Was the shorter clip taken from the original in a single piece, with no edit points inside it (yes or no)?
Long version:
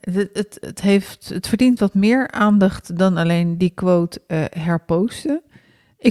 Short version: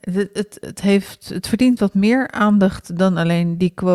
yes